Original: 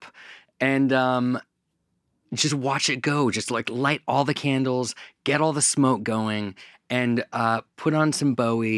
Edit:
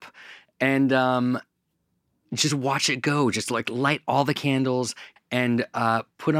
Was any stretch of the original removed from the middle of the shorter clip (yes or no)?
yes